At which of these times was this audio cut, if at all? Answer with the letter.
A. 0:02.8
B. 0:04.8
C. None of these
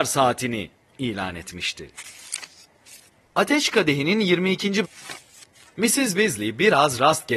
B